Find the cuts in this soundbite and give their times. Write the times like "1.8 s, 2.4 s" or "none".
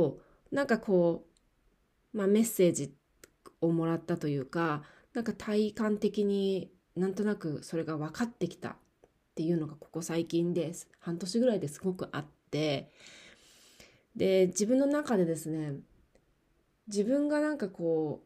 none